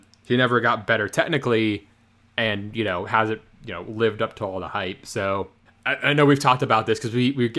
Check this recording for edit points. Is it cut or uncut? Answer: uncut